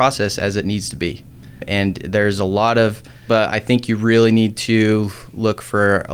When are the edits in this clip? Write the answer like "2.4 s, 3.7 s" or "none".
3.3 s